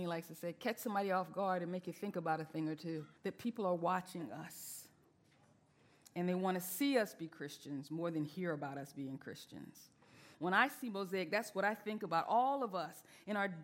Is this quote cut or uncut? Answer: cut